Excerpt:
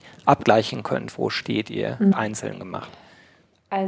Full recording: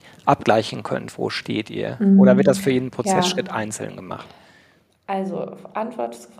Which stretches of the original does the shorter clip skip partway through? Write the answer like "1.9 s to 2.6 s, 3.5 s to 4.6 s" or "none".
2.1 s to 3.5 s